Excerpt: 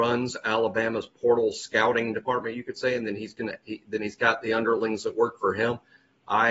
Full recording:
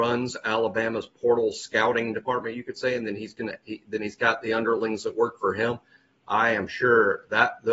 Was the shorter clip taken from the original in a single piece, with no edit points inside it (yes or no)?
yes